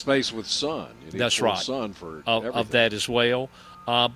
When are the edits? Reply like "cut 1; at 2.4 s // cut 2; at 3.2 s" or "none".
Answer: none